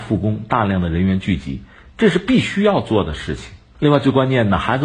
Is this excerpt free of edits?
no; 1 cut; at 3.7 s

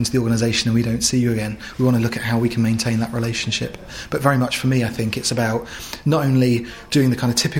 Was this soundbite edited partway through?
no; 0 cuts

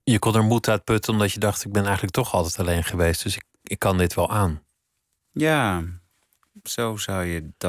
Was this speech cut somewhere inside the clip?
no; 0 cuts

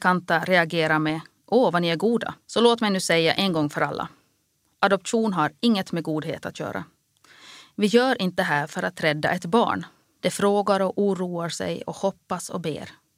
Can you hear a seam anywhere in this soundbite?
yes; 2 cuts; at 2.4 s, 10.2 s

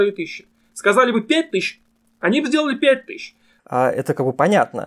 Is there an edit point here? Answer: yes; 1 cut; at 3.6 s

